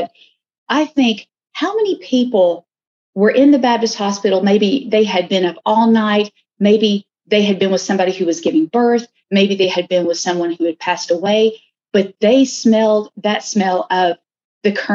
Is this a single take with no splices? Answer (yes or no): yes